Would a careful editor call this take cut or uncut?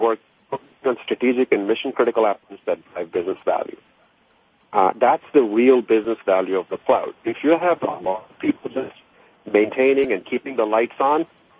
cut